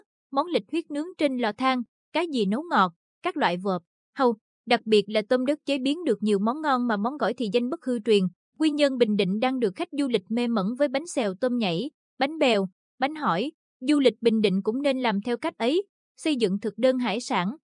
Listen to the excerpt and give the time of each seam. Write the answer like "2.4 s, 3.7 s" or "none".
8.5 s, 13.6 s